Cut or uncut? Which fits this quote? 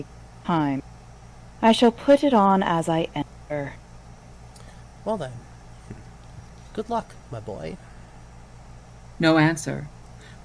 uncut